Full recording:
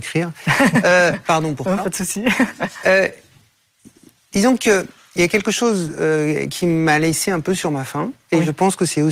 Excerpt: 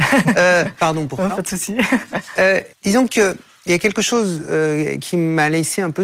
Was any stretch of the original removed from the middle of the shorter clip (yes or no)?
yes